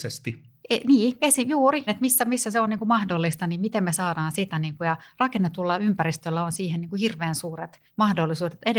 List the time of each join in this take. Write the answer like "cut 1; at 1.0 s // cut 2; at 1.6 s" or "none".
cut 1; at 1.9 s